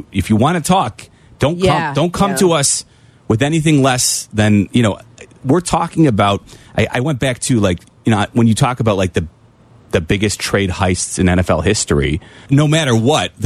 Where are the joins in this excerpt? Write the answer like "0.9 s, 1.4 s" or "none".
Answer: 12.5 s